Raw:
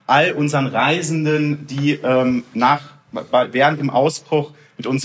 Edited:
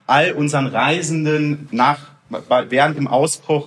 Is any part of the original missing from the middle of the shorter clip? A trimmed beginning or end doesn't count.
yes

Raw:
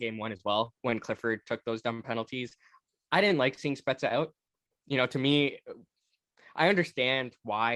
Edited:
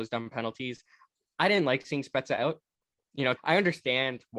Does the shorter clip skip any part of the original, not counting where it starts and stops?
yes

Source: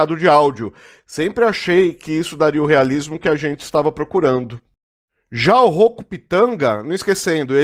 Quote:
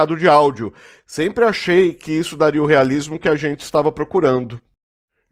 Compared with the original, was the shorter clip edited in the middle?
no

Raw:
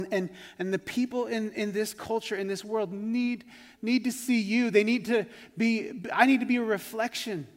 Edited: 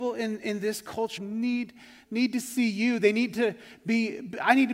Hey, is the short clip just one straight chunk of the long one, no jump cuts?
no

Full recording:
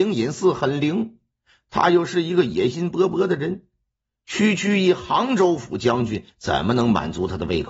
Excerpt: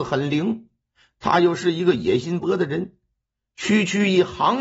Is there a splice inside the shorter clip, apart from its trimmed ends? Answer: yes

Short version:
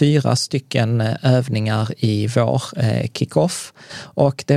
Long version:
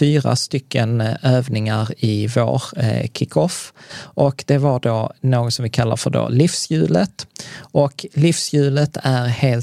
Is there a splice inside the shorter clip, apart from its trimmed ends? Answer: no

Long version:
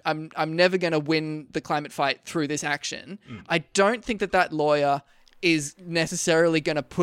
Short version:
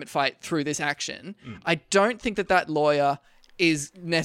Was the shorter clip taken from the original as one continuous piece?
yes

